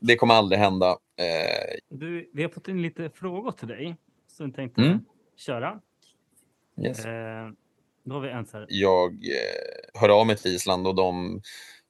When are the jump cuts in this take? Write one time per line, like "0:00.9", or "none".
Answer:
0:01.8
0:08.7
0:09.9